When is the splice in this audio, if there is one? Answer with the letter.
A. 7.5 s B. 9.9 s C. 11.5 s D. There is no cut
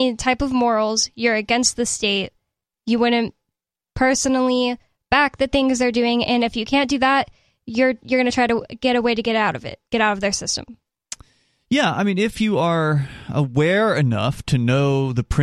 B